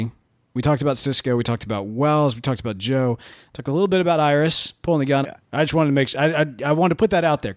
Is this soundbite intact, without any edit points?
no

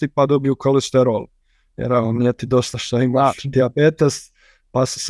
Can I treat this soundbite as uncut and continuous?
yes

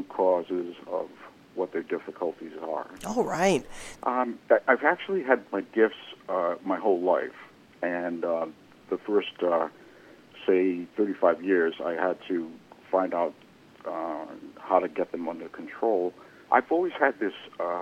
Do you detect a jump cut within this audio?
yes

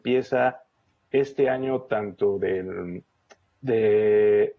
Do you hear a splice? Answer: no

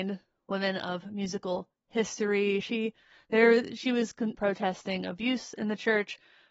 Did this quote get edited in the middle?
yes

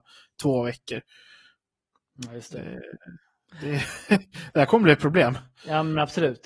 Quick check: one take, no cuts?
yes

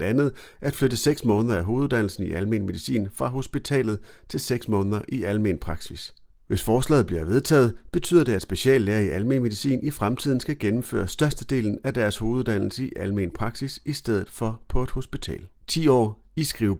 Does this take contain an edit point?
yes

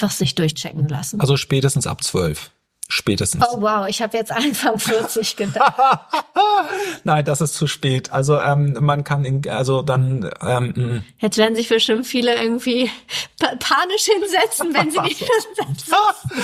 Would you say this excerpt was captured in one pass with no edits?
yes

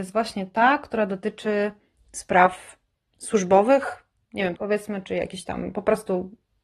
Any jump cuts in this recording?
yes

